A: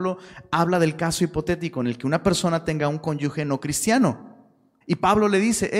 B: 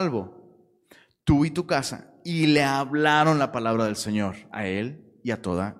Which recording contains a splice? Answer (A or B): A